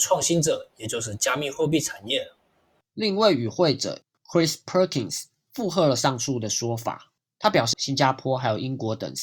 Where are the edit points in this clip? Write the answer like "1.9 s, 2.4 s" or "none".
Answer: 7.7 s